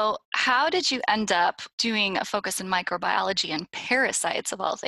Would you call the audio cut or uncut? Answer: uncut